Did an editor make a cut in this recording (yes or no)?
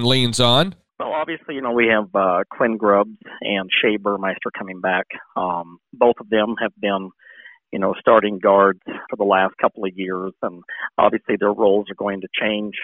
yes